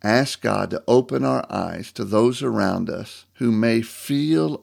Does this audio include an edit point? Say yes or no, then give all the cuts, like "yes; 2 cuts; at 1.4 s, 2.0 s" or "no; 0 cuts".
yes; 1 cut; at 3.3 s